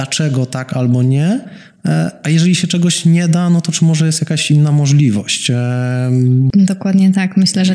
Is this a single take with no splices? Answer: no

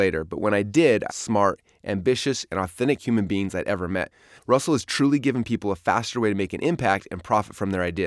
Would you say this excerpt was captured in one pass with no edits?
no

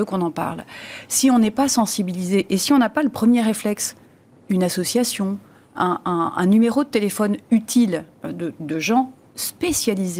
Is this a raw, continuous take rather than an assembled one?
yes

